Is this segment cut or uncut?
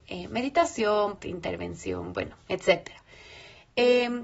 cut